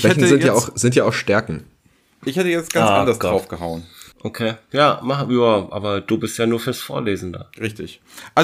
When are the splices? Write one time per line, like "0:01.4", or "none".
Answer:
0:04.1